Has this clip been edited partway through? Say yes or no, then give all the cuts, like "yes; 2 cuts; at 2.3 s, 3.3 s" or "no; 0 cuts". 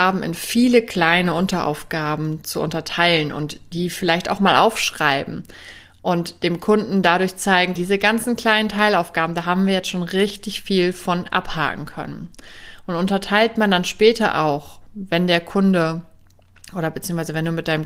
yes; 1 cut; at 7.8 s